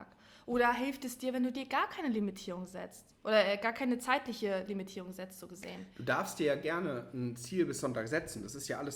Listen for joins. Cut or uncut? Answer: uncut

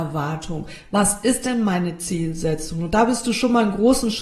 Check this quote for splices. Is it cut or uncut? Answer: uncut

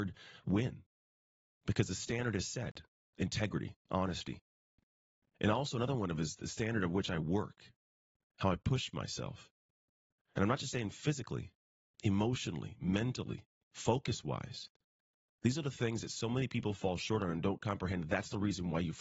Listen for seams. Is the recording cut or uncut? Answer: uncut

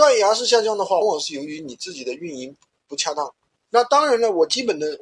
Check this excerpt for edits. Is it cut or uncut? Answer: cut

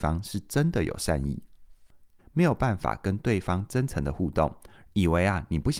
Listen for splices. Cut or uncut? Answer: cut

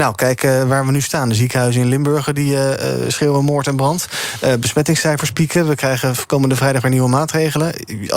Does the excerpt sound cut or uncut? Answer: uncut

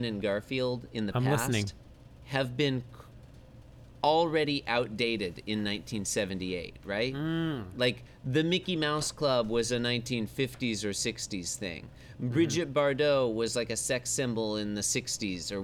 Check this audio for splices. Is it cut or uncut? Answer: uncut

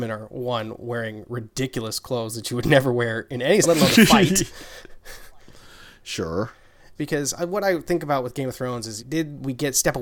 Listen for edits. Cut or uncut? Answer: cut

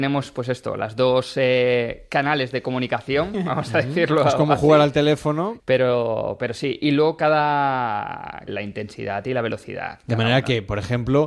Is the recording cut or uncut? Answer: cut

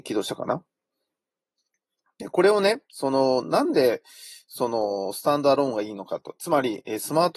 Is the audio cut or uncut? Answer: uncut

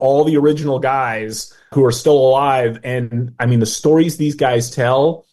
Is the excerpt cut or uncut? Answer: cut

